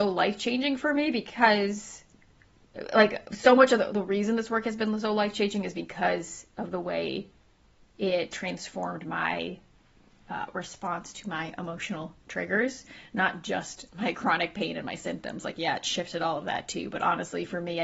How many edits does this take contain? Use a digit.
0